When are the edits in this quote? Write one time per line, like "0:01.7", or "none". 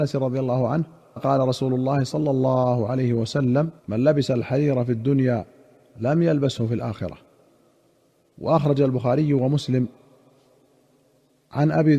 0:01.2
0:03.8